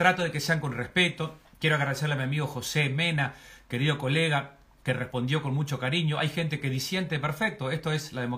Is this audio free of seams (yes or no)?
yes